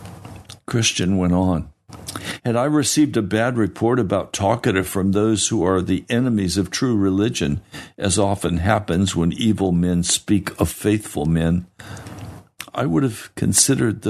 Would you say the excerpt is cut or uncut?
cut